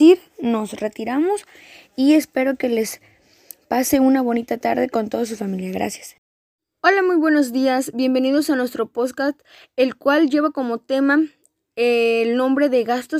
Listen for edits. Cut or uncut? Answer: uncut